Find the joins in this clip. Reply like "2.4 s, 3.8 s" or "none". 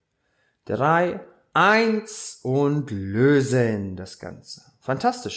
1.5 s

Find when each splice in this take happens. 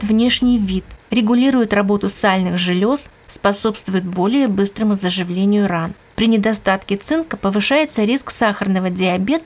none

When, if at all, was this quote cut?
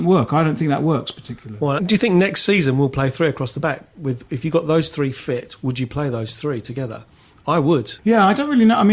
1.8 s, 8.0 s

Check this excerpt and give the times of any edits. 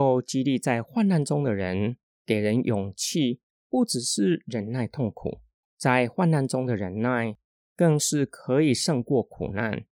none

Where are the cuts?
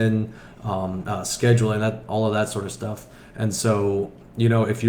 1.0 s

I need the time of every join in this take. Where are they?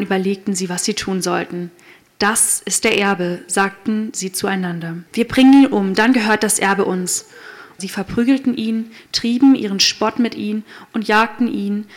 5.1 s, 7.8 s

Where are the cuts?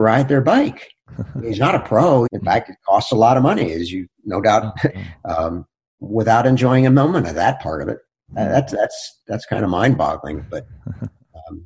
2.3 s, 4.9 s

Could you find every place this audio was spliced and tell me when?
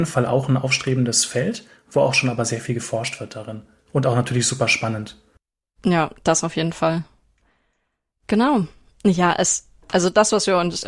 none

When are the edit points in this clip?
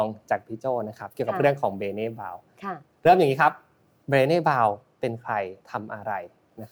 5.6 s

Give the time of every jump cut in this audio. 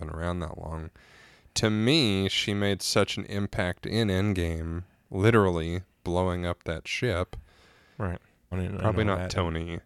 8.5 s

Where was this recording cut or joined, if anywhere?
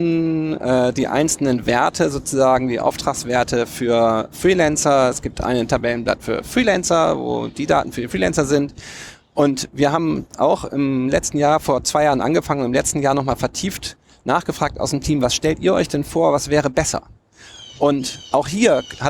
none

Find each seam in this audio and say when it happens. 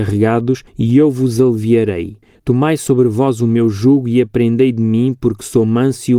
none

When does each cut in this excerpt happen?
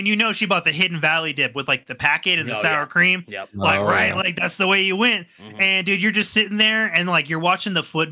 none

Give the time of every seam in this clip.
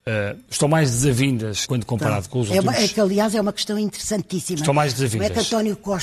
1.7 s

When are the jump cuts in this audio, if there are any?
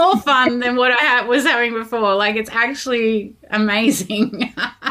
none

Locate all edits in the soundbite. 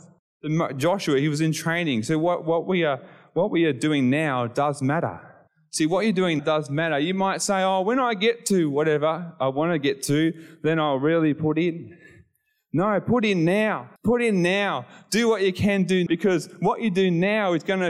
6.4 s, 14.0 s, 16.1 s

